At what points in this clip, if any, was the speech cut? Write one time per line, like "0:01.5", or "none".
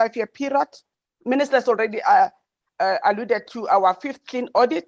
0:01.1